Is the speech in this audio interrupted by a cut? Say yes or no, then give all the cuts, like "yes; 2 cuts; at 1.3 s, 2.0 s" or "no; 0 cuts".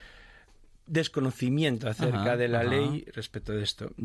no; 0 cuts